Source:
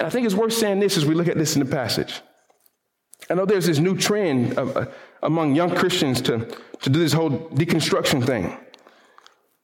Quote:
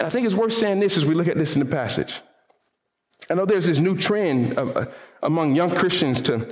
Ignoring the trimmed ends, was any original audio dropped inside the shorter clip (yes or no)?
no